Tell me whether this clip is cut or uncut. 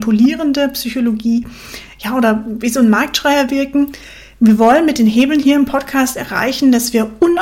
uncut